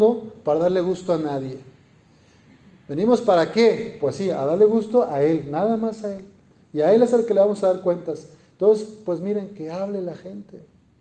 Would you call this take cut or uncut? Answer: uncut